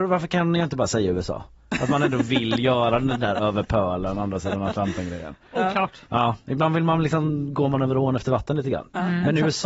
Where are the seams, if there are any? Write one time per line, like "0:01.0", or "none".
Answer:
none